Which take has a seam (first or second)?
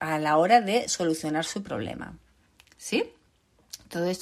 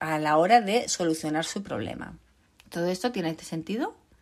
second